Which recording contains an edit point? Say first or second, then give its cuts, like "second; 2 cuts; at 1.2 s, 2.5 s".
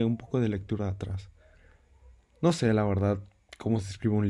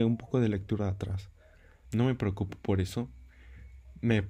second; 1 cut; at 1.8 s